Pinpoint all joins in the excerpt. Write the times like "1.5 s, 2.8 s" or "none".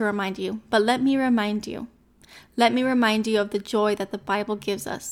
none